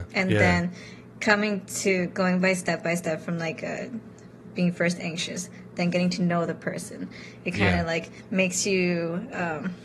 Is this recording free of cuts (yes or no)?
yes